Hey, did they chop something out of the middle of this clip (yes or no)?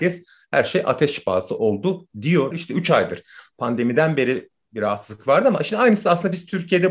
yes